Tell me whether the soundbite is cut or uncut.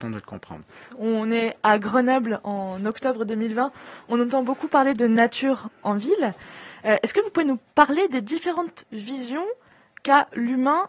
cut